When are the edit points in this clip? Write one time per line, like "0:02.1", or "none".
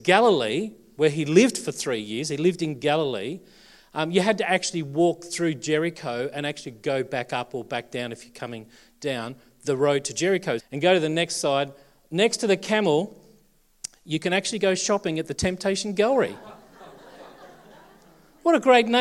0:10.6